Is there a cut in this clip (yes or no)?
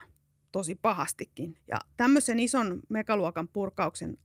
yes